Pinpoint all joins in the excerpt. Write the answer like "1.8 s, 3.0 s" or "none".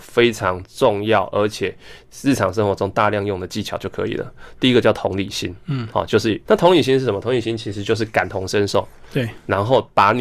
6.5 s